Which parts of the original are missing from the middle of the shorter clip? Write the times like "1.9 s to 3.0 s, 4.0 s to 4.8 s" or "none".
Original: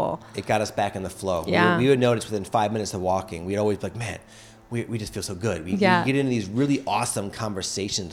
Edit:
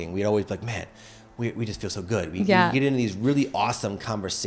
none